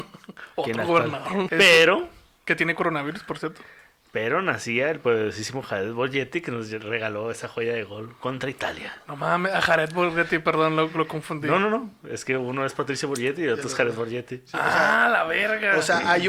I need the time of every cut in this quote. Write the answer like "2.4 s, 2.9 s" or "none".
1.5 s